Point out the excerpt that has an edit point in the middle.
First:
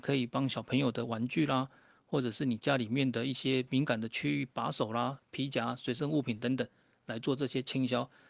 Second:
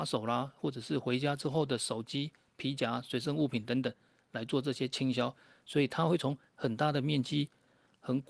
first; 1 cut; at 5.2 s

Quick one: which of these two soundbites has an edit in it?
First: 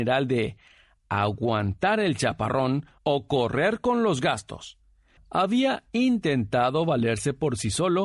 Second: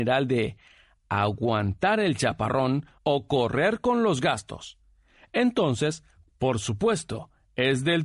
first; 1 cut; at 5.2 s

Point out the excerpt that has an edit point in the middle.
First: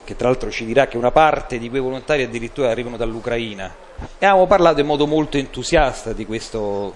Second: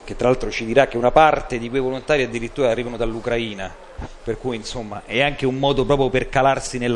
first; 1 cut; at 4.2 s

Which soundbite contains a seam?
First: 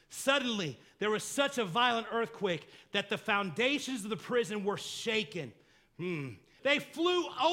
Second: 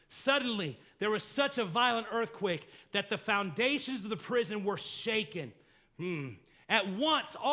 first; 1 cut; at 6.6 s

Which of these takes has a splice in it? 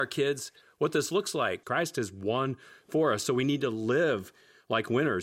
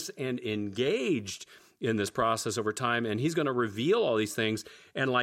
first; 1 cut; at 1.6 s

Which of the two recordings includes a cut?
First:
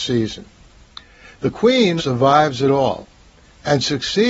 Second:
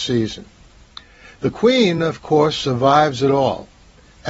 first; 1 cut; at 2.0 s

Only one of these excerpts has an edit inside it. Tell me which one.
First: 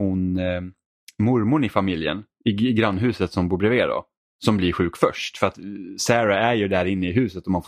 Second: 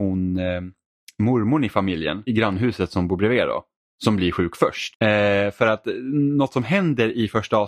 second; 2 cuts; at 2.3 s, 4.9 s

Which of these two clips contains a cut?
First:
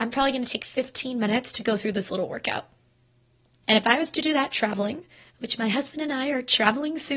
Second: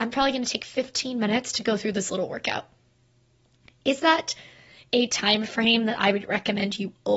first; 1 cut; at 3.6 s

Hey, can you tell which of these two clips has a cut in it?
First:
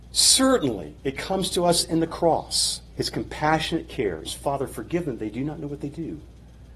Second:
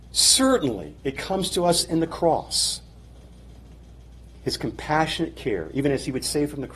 first; 2 cuts; at 2.9 s, 4.2 s

